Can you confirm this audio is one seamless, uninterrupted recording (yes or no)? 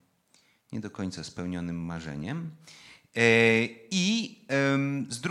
yes